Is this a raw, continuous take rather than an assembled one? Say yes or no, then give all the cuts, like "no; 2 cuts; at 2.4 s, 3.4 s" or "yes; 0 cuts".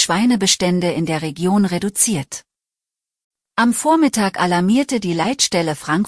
no; 1 cut; at 3.4 s